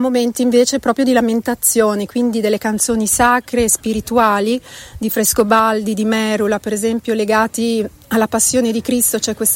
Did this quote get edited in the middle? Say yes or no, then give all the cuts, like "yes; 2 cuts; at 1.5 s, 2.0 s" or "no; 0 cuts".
no; 0 cuts